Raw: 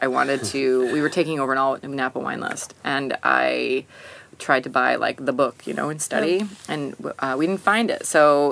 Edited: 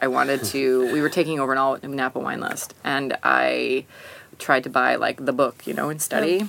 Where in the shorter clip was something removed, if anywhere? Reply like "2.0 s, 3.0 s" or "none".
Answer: none

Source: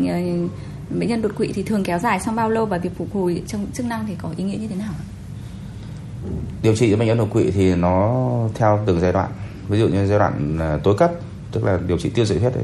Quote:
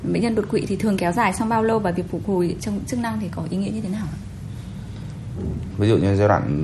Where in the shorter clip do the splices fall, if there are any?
5.7 s

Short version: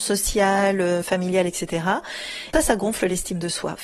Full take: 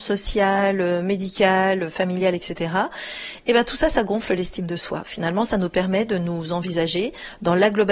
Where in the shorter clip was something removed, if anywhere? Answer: 1.0 s, 2.5 s

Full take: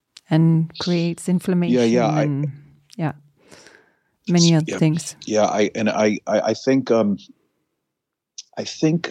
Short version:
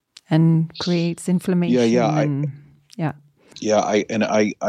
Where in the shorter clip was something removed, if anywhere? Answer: 3.5 s

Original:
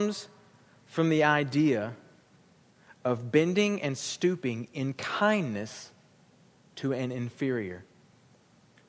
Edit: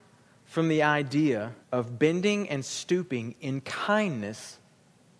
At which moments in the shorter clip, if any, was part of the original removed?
1.6 s

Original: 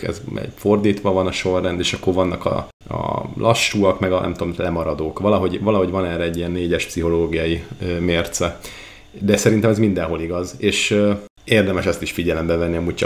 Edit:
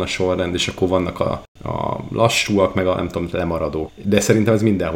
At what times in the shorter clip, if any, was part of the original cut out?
3.9 s

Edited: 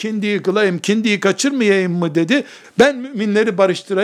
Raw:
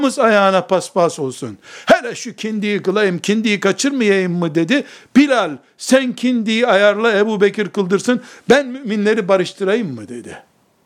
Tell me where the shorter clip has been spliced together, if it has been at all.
2.6 s

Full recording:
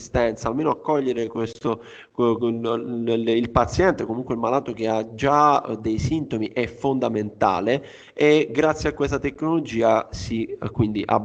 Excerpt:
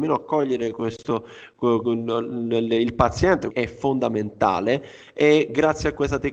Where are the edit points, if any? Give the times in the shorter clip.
3.5 s

